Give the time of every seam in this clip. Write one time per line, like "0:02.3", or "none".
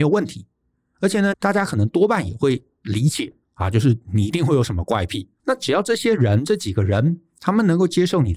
0:01.3
0:05.4